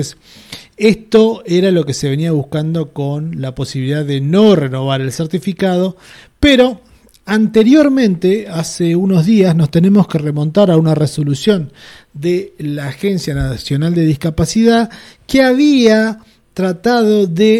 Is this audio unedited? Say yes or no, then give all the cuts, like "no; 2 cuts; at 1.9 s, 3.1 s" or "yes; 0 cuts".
yes; 0 cuts